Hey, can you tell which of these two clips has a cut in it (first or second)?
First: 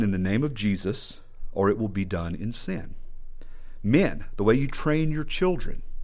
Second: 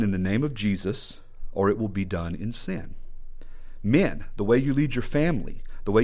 first